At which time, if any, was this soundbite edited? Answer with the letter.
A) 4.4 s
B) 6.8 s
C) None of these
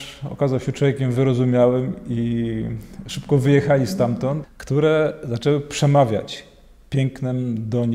A